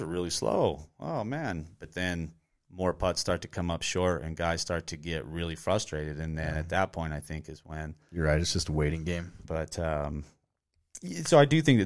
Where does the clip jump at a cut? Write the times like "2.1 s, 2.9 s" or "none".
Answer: 9.4 s